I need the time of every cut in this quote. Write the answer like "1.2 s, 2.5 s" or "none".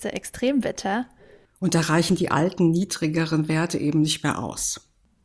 1.4 s

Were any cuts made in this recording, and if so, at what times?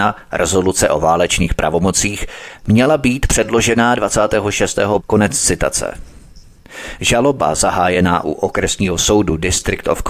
5.0 s

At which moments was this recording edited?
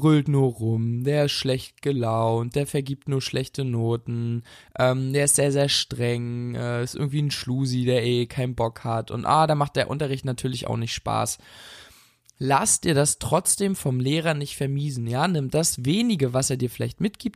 none

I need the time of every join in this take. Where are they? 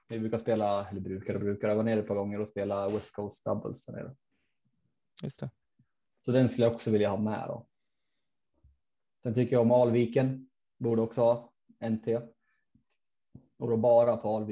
none

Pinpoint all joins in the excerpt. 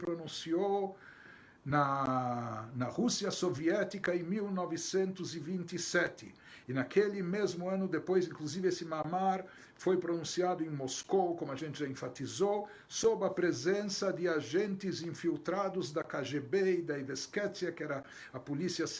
none

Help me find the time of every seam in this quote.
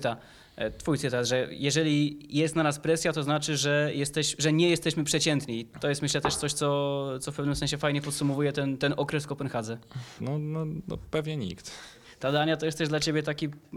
10.2 s

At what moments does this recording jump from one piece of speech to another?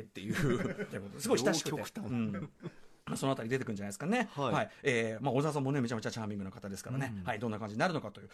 0.9 s

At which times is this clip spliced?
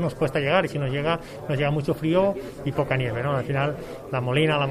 none

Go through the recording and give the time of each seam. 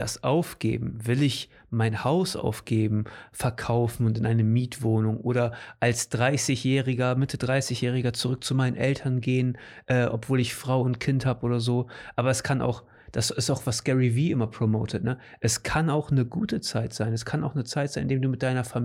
none

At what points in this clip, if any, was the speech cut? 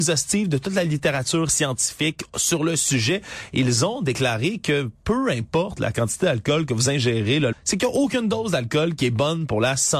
7.5 s

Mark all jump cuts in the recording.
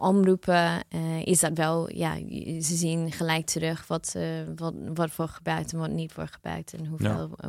none

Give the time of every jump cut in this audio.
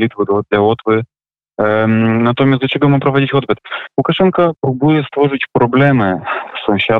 4.6 s

